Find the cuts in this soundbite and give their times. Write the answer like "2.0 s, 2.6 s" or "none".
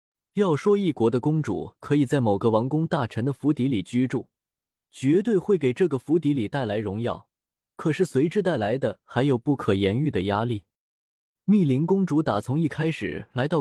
none